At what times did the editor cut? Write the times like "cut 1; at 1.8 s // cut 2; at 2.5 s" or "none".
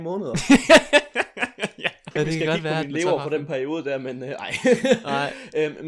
cut 1; at 2.2 s

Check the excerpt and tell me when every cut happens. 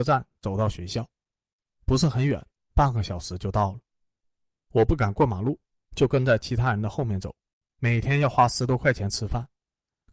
cut 1; at 7.6 s

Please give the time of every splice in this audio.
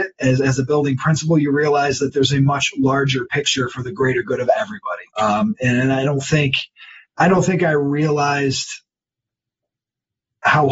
cut 1; at 5.1 s

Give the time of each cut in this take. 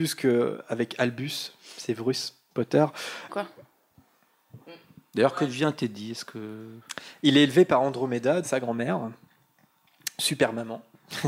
cut 1; at 3.3 s // cut 2; at 8.4 s

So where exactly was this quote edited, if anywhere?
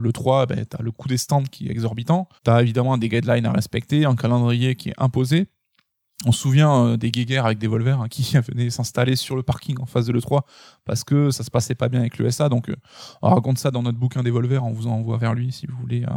cut 1; at 2.4 s

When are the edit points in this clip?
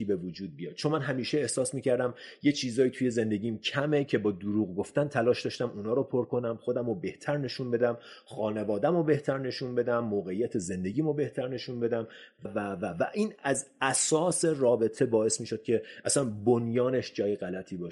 cut 1; at 12.4 s

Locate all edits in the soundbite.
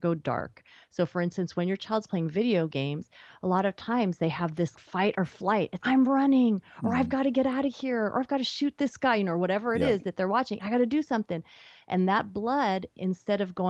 cut 1; at 4.7 s // cut 2; at 5.8 s // cut 3; at 10.6 s

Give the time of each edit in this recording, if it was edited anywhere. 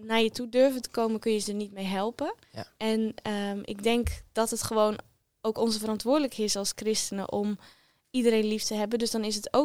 cut 1; at 2.4 s

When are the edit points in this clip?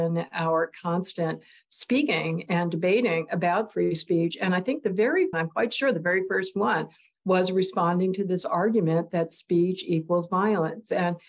cut 1; at 5.3 s

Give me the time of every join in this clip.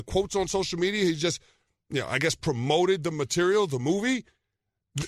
none

